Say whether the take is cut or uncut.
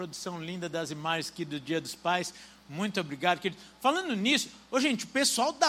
uncut